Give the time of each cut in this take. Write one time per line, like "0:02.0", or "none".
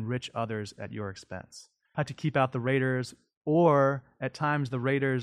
0:01.9